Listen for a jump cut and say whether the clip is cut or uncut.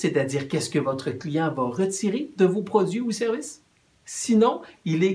cut